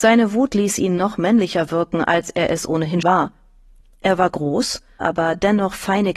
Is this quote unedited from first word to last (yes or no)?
no